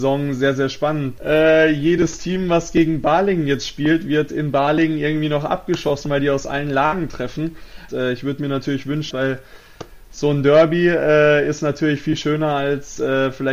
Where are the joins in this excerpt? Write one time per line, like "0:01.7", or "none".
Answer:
0:01.2
0:07.9
0:09.1

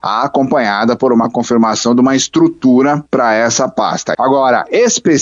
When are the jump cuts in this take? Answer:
0:03.1
0:04.1

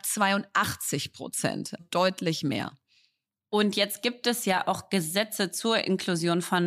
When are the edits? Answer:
0:01.8

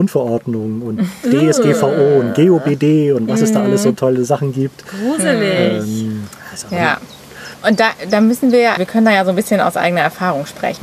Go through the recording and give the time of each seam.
0:07.5
0:08.8

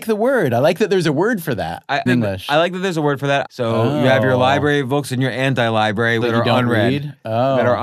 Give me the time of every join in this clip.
0:02.1
0:03.5
0:06.2

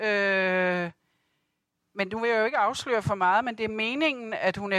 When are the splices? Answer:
none

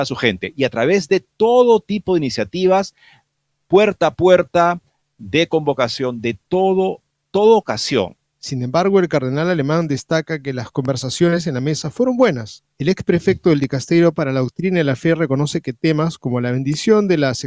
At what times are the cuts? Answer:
0:08.3
0:12.7

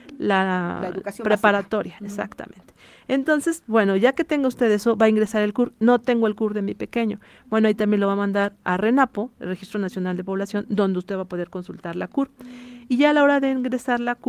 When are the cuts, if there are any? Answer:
none

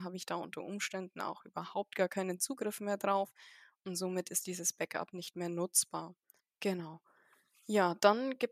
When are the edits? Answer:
0:06.4

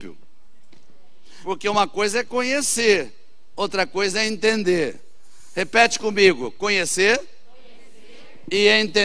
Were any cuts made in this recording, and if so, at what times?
0:01.4

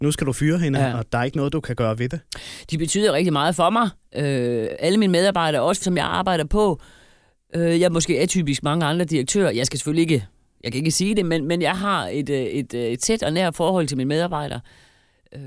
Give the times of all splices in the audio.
0:05.8

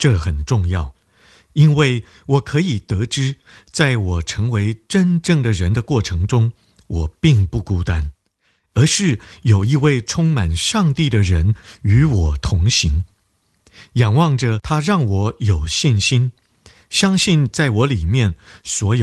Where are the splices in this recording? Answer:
none

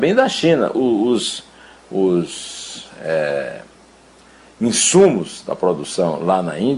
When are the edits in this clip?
none

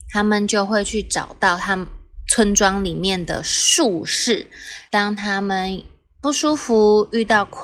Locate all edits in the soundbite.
0:04.9

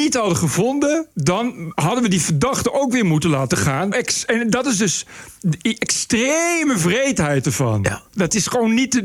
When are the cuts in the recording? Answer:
0:01.1
0:03.9

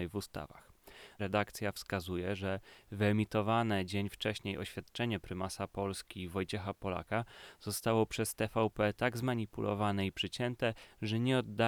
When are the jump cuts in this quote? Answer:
0:01.2

